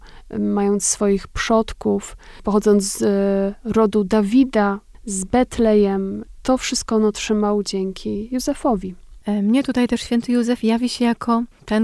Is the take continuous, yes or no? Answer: no